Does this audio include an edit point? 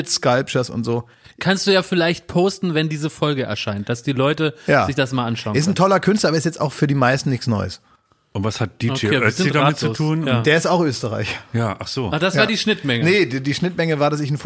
no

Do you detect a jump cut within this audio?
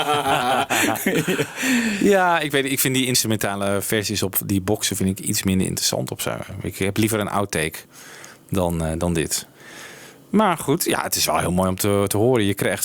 no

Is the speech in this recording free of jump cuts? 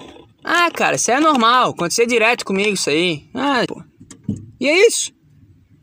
no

